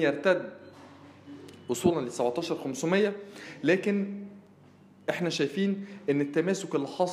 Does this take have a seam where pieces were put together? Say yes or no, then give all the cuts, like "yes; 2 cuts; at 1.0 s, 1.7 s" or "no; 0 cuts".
no; 0 cuts